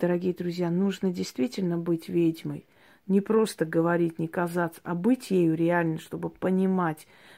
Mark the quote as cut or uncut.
uncut